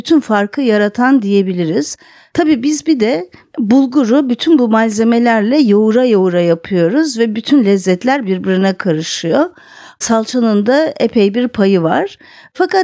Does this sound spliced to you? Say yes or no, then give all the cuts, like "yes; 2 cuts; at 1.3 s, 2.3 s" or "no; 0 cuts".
yes; 1 cut; at 10.0 s